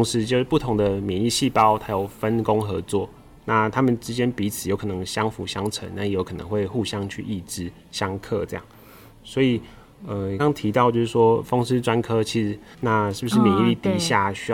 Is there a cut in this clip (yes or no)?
yes